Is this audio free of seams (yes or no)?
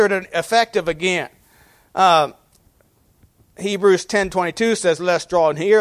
yes